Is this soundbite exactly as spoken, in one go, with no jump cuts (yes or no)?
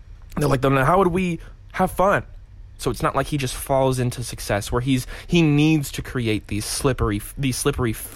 no